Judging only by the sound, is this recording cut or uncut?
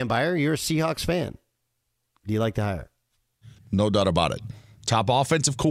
cut